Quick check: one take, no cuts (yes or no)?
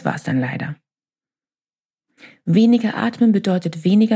yes